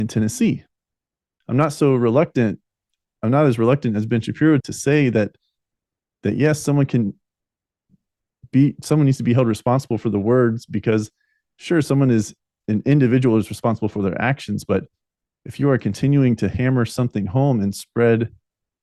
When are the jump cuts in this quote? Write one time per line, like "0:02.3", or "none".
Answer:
0:01.3
0:04.6